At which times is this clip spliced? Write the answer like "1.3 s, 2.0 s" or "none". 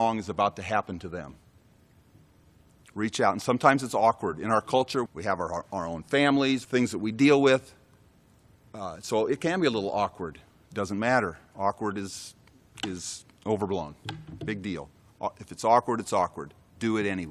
5.1 s, 6.6 s

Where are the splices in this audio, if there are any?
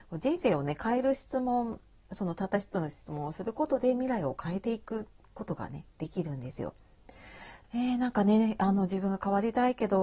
7.6 s

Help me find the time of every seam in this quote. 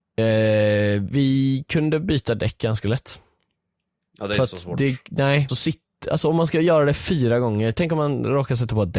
5.5 s

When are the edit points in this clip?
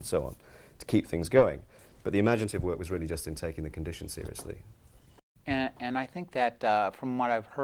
none

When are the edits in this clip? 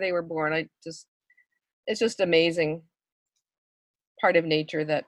none

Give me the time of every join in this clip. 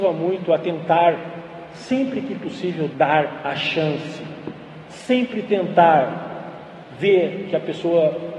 2.9 s, 4.8 s

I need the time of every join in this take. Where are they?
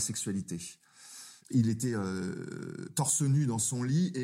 1.4 s

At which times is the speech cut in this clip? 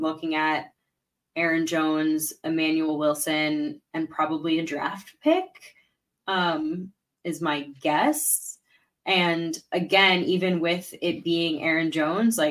none

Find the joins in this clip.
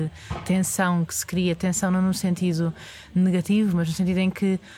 none

